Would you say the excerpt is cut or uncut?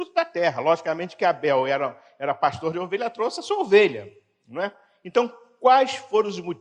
uncut